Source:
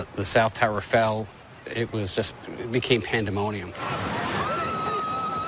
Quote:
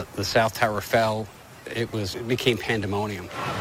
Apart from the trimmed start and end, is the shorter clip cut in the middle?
yes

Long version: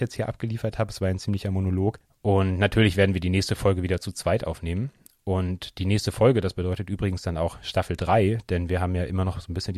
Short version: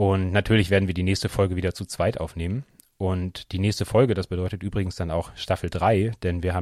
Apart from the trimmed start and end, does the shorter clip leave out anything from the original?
no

